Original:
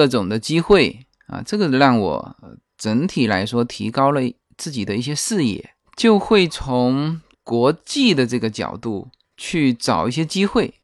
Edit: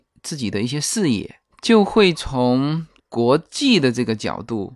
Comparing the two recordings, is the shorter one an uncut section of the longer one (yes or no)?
yes